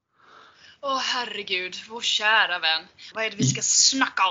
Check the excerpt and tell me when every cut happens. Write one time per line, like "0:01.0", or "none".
0:03.1